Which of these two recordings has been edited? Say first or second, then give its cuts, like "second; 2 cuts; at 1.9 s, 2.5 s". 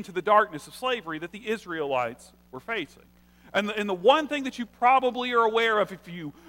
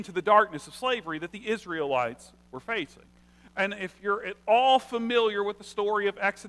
second; 1 cut; at 3.5 s